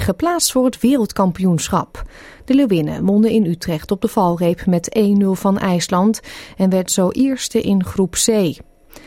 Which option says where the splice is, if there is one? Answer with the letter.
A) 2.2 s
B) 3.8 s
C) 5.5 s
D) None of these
D